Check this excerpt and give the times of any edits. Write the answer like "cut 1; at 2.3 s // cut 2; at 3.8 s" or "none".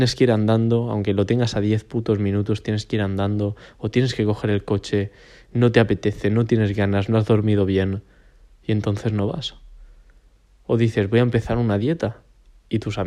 none